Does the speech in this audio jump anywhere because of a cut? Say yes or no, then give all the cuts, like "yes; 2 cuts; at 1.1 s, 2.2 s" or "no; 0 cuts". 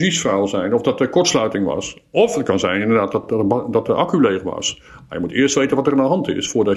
no; 0 cuts